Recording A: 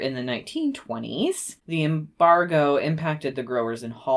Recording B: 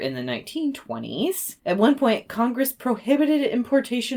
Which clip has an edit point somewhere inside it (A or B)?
A